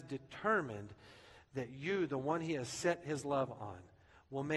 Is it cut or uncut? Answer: uncut